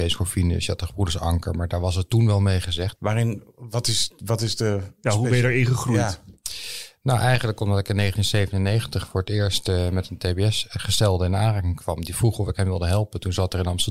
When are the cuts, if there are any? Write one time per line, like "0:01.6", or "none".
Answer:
0:03.0